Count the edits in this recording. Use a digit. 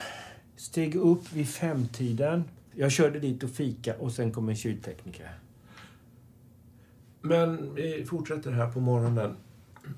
1